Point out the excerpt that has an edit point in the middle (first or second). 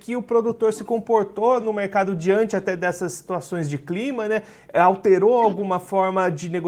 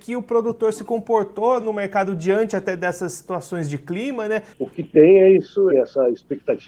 second